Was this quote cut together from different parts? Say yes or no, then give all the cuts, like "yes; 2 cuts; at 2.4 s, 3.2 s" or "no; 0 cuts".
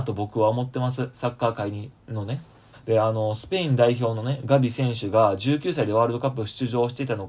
yes; 1 cut; at 2.7 s